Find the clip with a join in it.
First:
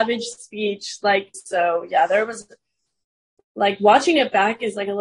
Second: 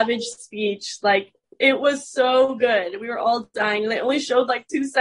first; 1 cut; at 1.3 s

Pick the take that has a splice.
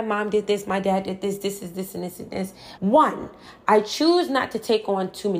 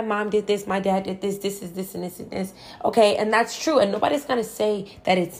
first; 1 cut; at 2.8 s

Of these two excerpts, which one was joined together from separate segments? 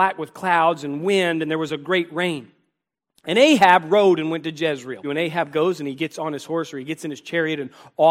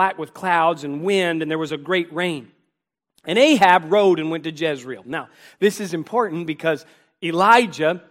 first; 1 cut; at 5.0 s

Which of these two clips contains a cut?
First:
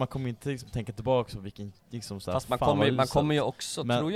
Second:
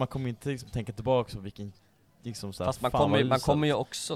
first; 1 cut; at 1.8 s

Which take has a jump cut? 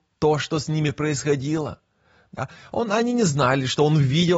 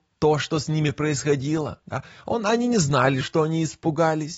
second; 2 cuts; at 1.8 s, 3.2 s

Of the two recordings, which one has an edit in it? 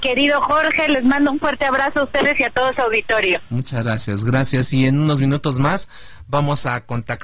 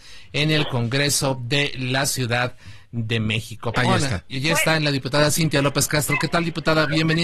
second; 1 cut; at 3.7 s

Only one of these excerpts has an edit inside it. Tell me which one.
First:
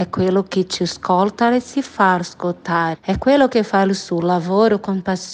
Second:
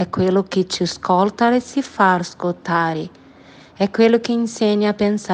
first; 1 cut; at 2.9 s

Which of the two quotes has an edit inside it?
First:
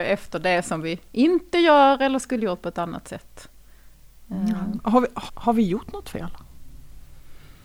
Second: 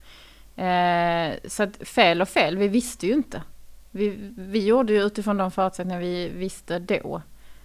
first; 1 cut; at 5.3 s

